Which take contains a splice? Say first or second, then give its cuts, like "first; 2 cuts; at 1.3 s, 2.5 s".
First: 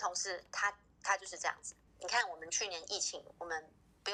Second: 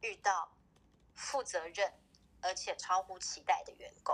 first; 1 cut; at 1.9 s